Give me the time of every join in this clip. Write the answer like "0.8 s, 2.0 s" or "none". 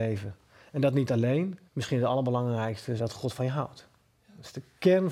1.7 s, 3.0 s